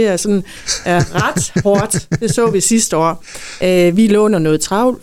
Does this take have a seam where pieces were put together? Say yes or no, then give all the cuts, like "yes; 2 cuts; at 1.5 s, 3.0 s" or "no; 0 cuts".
no; 0 cuts